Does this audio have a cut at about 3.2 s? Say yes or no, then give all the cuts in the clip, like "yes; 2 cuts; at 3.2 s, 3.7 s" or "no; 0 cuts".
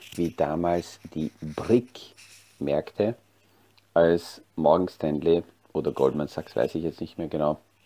no; 0 cuts